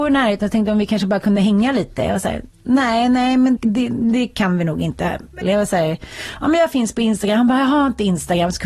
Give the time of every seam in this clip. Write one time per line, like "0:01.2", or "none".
0:03.6
0:05.4